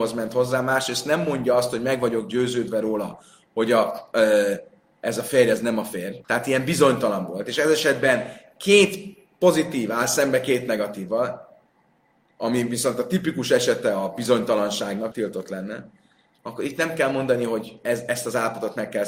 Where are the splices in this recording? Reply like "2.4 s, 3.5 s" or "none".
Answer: 6.2 s, 15.1 s